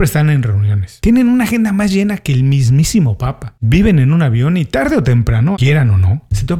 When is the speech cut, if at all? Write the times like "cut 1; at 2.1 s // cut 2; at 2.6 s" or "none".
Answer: cut 1; at 5.5 s